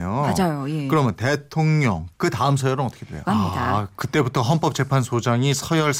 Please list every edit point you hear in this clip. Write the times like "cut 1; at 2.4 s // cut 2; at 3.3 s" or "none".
cut 1; at 2.1 s // cut 2; at 3.2 s